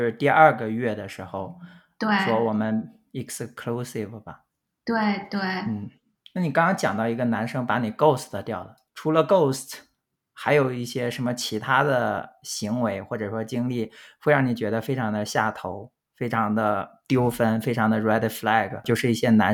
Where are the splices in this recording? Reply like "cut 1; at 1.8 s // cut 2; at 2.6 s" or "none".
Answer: none